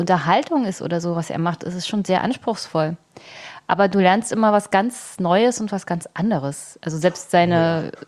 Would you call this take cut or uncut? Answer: uncut